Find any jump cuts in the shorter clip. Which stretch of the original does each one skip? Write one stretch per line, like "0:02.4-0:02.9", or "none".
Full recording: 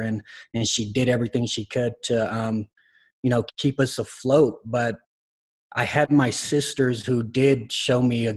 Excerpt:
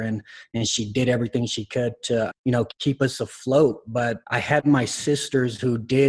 0:02.3-0:03.1
0:05.0-0:05.7